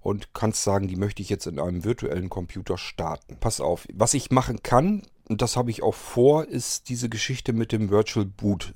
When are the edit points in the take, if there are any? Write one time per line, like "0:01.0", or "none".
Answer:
0:03.4

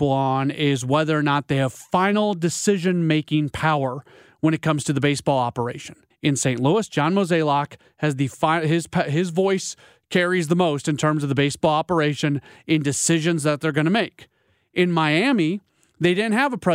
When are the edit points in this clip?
0:06.1

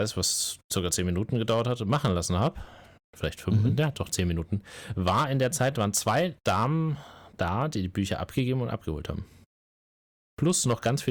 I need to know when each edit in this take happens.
none

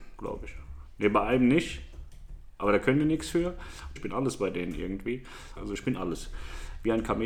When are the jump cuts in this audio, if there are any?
0:04.0
0:05.6

